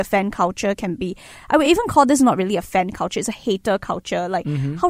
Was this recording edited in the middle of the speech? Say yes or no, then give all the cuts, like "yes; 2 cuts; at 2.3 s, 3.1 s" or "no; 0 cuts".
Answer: no; 0 cuts